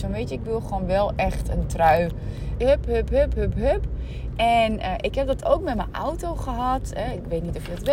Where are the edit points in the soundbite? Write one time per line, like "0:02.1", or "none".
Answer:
0:02.6
0:04.3

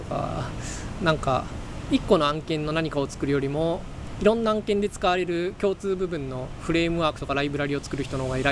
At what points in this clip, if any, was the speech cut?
0:01.0

